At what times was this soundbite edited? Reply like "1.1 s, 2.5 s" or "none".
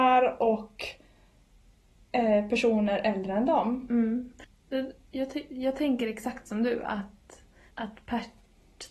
7.7 s